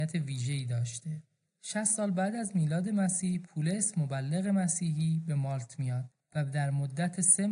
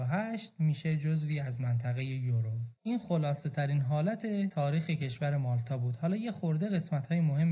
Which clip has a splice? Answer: second; 1 cut; at 2.8 s

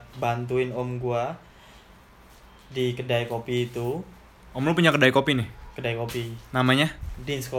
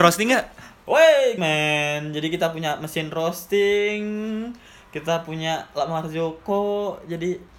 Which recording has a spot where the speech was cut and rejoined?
second; 1 cut; at 1.4 s

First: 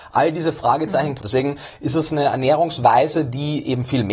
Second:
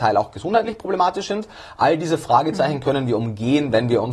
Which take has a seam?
first; 1 cut; at 1.2 s

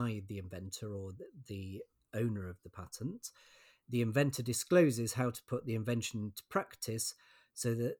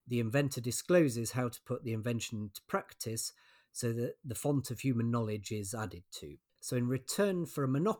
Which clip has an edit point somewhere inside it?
second; 1 cut; at 6.5 s

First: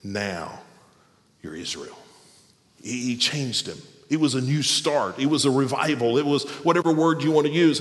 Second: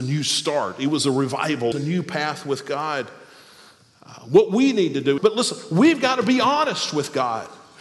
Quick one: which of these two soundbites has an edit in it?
second; 2 cuts; at 1.7 s, 5.2 s

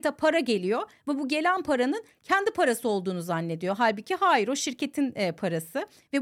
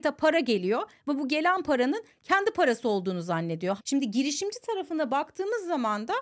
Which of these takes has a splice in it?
second; 1 cut; at 3.8 s

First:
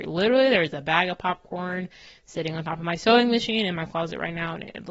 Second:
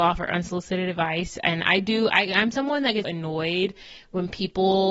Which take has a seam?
second; 1 cut; at 3.0 s

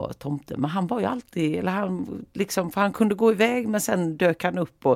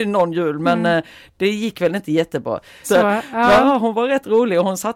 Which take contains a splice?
second; 1 cut; at 2.8 s

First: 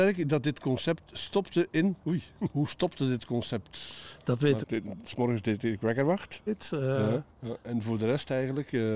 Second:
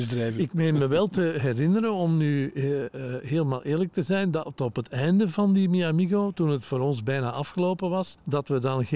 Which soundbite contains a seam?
first; 2 cuts; at 4.6 s, 6.5 s

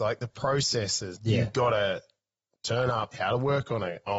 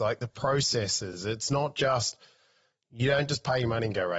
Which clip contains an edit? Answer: first; 2 cuts; at 1.1 s, 3.1 s

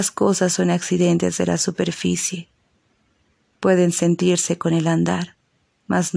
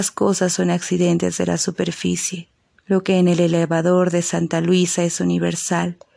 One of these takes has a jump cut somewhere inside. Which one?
second; 1 cut; at 2.8 s

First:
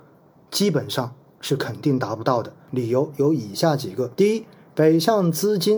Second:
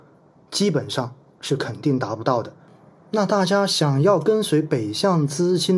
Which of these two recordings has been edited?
first; 2 cuts; at 2.7 s, 4.1 s

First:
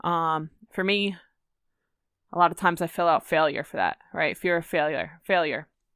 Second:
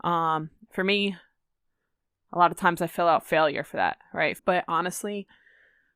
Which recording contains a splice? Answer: second; 1 cut; at 4.4 s

